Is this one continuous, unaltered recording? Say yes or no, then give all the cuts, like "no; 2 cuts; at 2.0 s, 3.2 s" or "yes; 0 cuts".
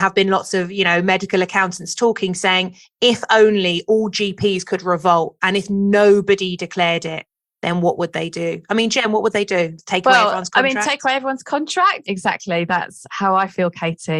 yes; 0 cuts